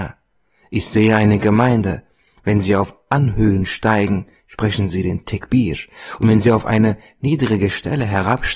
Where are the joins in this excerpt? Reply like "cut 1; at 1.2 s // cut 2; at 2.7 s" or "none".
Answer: none